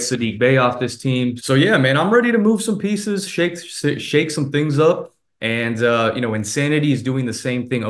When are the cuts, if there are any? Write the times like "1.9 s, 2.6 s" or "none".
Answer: 1.4 s